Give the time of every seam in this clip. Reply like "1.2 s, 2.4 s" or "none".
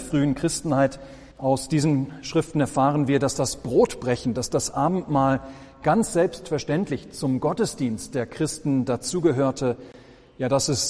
1.3 s